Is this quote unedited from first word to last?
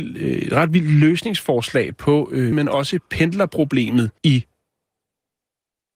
no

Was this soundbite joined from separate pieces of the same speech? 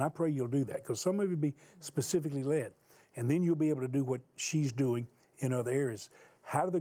no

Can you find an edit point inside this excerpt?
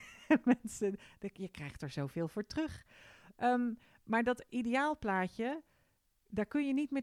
no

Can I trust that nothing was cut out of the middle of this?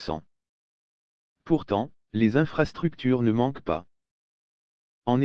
no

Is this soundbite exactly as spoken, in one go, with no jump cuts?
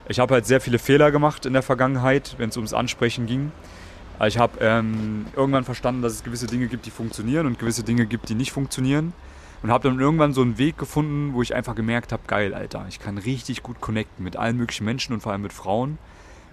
yes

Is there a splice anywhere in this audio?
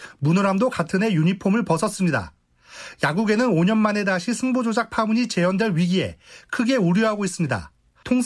no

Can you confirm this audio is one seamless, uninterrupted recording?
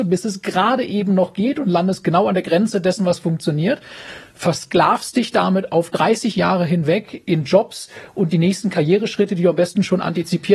yes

